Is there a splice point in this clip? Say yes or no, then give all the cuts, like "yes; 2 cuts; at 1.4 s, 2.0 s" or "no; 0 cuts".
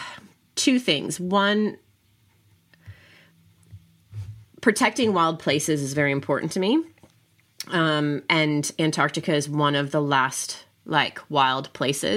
no; 0 cuts